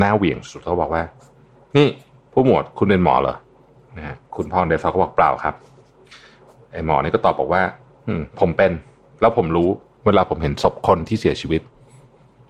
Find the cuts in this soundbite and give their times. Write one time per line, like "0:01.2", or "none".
0:04.2